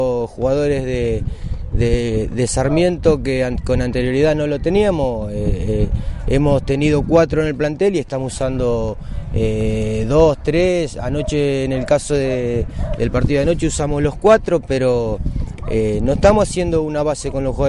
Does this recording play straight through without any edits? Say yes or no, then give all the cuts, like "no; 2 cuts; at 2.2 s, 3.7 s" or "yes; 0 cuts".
yes; 0 cuts